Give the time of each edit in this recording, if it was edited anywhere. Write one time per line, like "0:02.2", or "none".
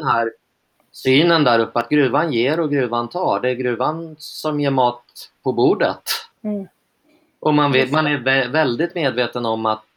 0:06.3